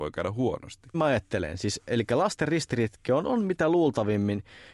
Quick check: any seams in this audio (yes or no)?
yes